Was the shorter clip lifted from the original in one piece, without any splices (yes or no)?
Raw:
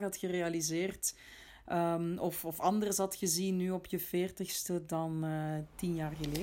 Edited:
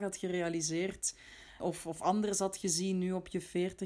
no